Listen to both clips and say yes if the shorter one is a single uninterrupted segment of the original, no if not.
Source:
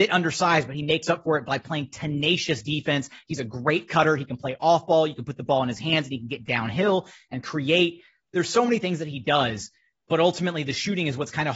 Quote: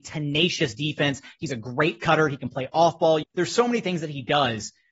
no